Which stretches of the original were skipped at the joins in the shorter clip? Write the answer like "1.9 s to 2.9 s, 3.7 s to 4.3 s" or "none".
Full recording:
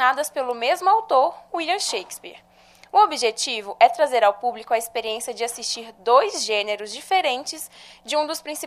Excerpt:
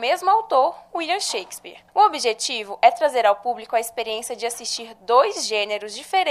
2.5 s to 2.9 s